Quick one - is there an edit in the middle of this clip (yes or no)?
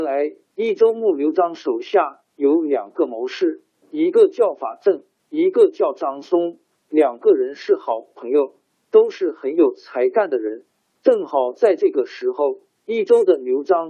yes